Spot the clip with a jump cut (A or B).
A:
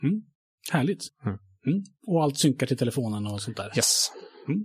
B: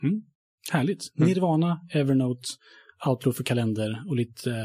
A